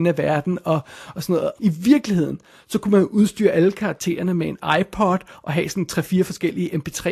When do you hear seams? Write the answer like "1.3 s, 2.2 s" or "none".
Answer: 1.6 s

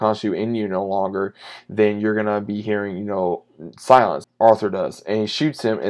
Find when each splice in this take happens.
4.2 s

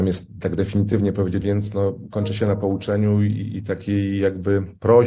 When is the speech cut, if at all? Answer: 1.4 s

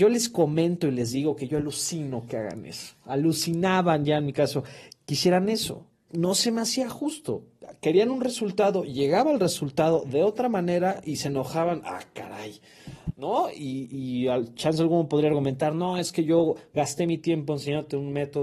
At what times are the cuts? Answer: none

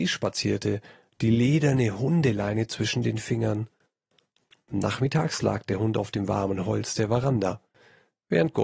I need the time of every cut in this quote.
none

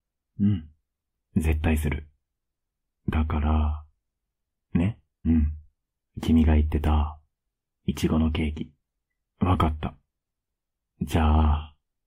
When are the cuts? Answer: 5.2 s, 9.2 s

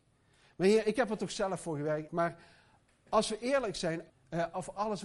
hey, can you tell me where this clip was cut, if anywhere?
2.1 s, 4.1 s

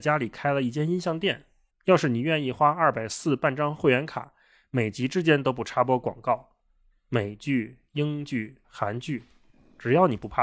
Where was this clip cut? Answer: 1.7 s, 8.6 s

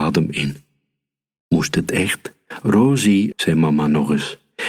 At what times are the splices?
3.3 s

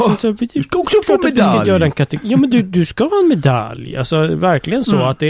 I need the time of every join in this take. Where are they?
none

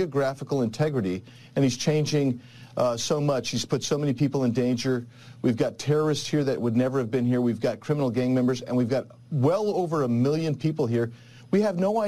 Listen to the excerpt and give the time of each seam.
none

